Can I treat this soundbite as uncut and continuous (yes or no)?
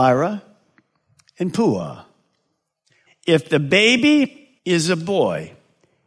no